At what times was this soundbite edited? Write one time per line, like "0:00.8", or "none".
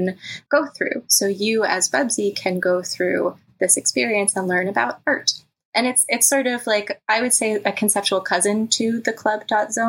none